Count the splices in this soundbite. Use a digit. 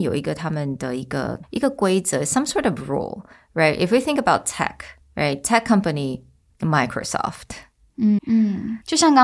2